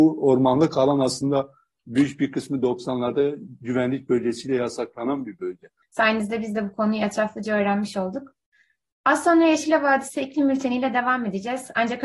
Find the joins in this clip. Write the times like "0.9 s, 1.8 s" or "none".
5.8 s